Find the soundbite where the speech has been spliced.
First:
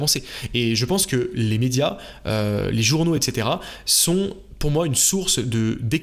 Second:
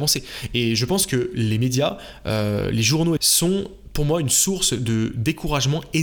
second; 1 cut; at 3.2 s

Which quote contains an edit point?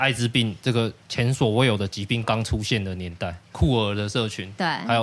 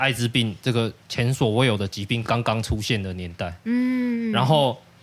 first; 2 cuts; at 2.2 s, 3.4 s

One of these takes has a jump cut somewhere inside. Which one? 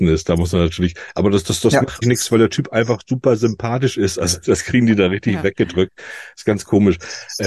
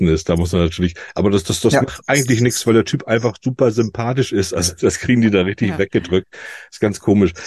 first; 1 cut; at 2.0 s

